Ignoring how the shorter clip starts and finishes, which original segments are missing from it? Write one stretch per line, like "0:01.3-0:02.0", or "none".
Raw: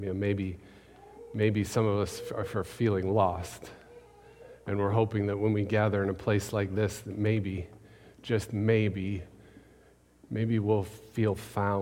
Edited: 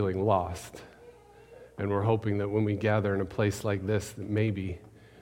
none